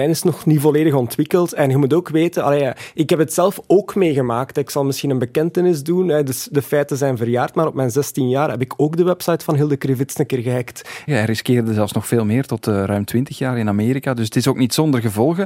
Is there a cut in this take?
yes; 1 cut; at 11.1 s

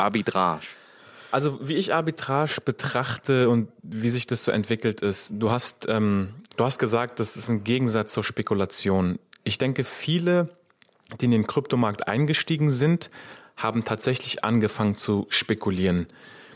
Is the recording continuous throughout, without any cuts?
yes; 0 cuts

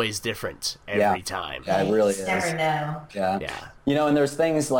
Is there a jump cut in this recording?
no; 0 cuts

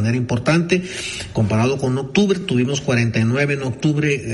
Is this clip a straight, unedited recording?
yes; 0 cuts

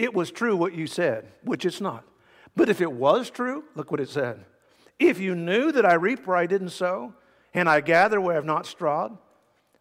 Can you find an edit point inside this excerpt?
no; 0 cuts

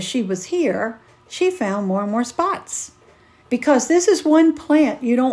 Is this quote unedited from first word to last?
no; 1 cut; at 3.4 s

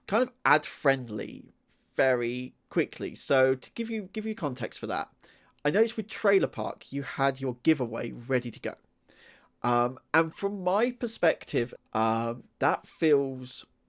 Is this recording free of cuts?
no; 1 cut; at 11.8 s

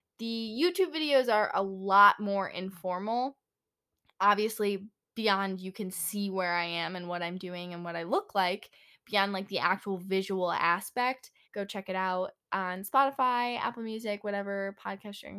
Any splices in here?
yes; 1 cut; at 11.4 s

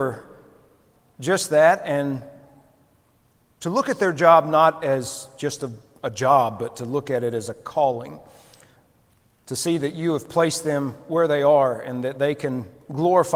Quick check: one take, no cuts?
yes; 0 cuts

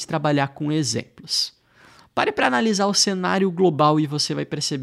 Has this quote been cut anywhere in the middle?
no; 0 cuts

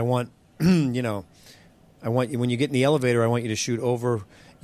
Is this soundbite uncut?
yes; 0 cuts

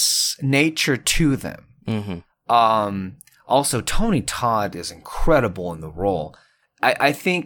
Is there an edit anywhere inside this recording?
yes; 1 cut; at 2.3 s

